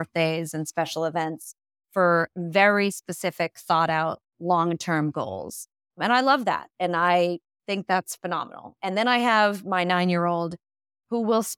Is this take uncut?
yes; 0 cuts

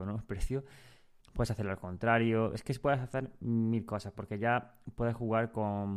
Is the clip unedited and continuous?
no; 1 cut; at 1.2 s

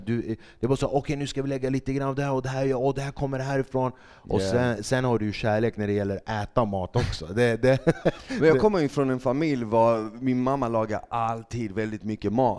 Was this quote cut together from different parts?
no; 0 cuts

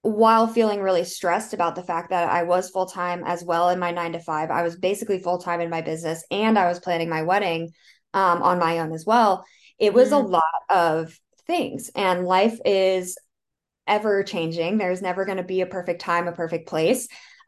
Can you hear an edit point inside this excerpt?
no; 0 cuts

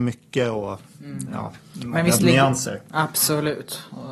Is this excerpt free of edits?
yes; 0 cuts

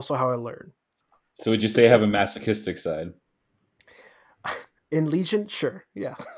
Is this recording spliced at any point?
yes; 1 cut; at 1.0 s

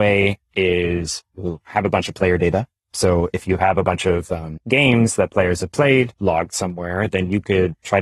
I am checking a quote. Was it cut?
no; 0 cuts

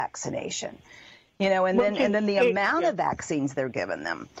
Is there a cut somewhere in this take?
no; 0 cuts

